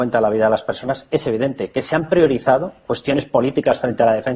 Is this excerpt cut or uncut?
uncut